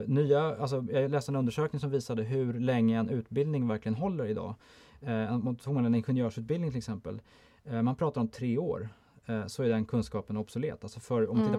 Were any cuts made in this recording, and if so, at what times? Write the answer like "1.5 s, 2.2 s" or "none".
none